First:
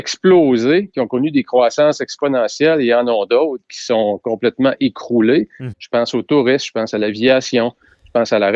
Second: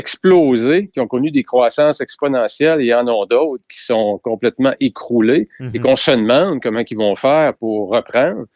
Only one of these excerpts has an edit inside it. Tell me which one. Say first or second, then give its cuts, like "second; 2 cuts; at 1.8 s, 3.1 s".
first; 1 cut; at 5.7 s